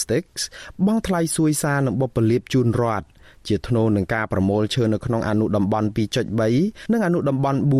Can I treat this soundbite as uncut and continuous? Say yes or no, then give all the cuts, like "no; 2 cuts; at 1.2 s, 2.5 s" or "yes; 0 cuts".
yes; 0 cuts